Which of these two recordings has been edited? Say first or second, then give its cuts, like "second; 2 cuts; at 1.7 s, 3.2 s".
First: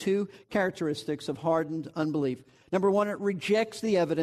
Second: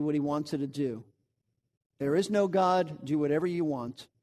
second; 1 cut; at 1.9 s